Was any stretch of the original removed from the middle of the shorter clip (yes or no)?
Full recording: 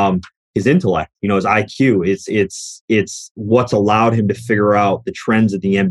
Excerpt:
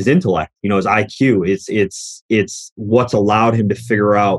no